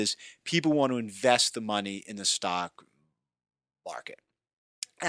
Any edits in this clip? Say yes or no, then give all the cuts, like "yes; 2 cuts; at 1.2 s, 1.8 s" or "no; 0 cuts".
no; 0 cuts